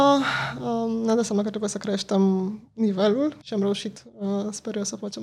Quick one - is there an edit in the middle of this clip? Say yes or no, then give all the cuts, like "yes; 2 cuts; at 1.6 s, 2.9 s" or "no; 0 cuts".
yes; 1 cut; at 3.4 s